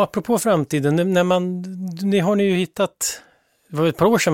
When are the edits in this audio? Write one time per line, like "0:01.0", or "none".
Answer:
none